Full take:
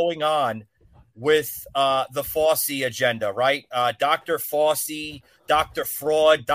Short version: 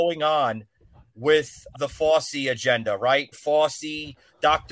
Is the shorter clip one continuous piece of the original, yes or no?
no